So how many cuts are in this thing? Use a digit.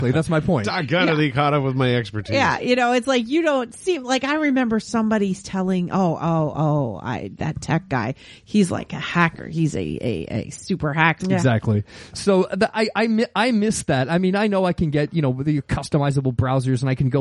1